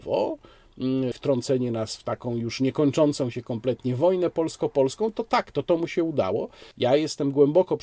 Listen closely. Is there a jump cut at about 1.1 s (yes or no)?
yes